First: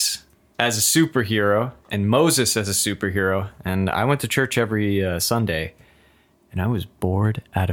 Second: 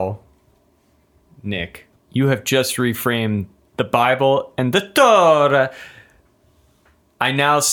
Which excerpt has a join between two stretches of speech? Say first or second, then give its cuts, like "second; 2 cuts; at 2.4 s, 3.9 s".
second; 1 cut; at 1.9 s